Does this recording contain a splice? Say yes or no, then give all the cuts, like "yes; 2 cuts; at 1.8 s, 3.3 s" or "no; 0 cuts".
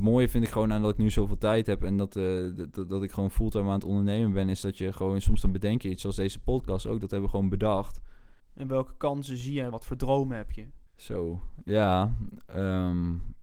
yes; 3 cuts; at 8.4 s, 9.7 s, 10.9 s